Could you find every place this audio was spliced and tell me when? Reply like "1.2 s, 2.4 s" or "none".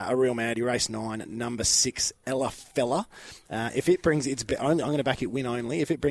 none